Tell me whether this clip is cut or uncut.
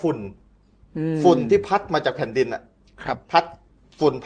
uncut